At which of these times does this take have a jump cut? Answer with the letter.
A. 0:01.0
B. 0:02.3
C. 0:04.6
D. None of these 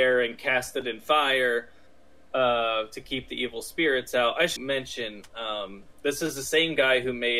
C